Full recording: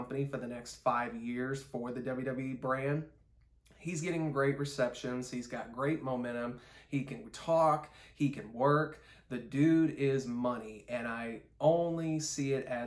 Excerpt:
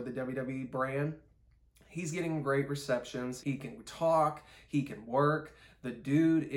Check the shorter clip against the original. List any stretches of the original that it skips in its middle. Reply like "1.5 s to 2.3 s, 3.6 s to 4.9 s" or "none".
5.3 s to 6.9 s